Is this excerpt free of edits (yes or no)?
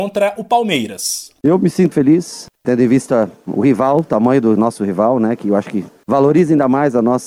no